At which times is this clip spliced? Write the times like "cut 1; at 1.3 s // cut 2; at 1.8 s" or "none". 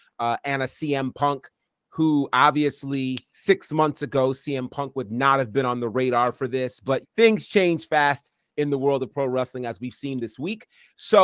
cut 1; at 7.0 s